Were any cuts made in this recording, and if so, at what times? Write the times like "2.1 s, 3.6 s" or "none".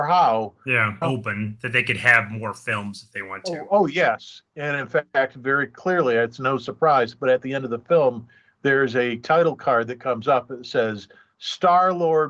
1.0 s